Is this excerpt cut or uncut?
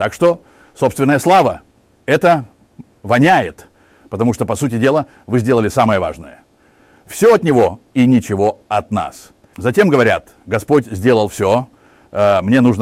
cut